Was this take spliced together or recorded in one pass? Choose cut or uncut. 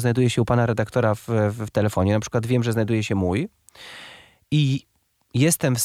uncut